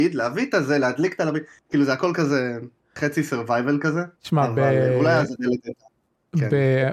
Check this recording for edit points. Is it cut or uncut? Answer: cut